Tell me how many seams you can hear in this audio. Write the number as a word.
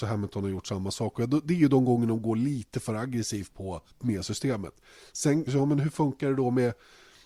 two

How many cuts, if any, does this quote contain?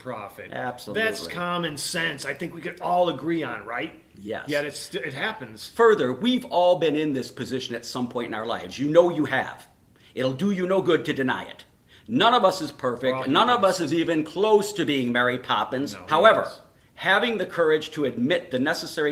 one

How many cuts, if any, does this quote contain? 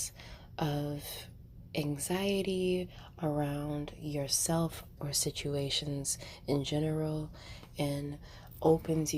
one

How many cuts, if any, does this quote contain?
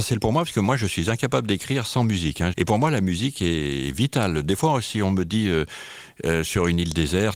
one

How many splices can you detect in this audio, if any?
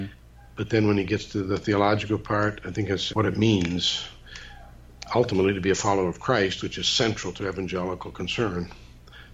one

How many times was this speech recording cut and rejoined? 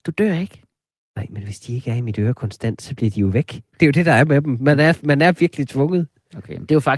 zero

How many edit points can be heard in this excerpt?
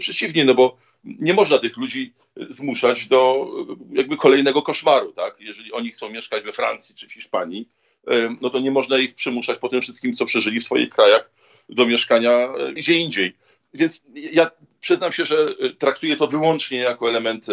one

